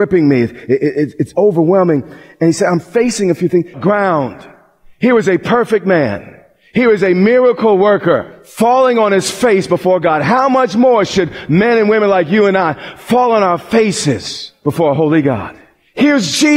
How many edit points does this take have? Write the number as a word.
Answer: one